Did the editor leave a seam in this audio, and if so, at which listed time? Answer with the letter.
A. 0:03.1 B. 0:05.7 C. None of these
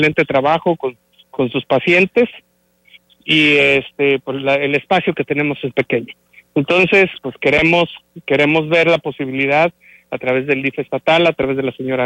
B